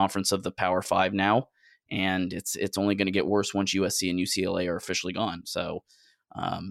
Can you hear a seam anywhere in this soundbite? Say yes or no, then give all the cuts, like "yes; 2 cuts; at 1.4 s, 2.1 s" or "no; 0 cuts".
no; 0 cuts